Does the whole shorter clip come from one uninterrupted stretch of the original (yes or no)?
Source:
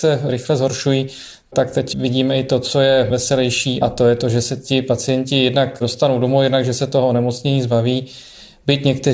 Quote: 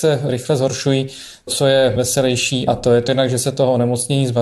no